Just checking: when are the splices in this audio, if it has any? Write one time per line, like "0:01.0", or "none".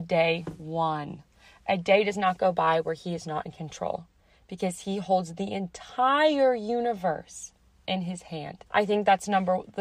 0:08.7